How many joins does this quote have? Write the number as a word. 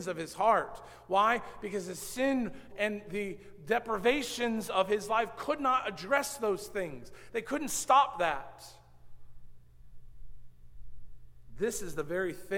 one